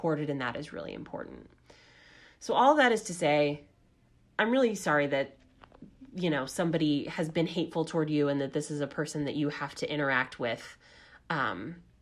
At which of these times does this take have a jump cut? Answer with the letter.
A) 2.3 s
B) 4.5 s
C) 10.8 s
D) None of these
D